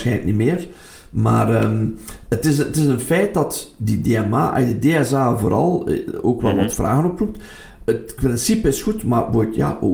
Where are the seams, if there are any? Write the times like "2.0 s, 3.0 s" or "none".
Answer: none